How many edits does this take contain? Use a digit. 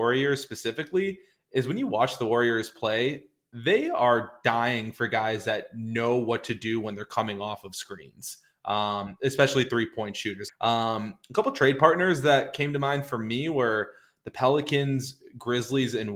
1